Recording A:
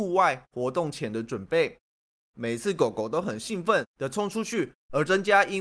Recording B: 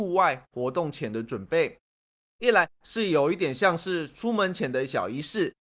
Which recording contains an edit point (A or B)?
A